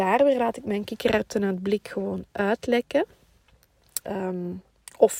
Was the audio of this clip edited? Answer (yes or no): yes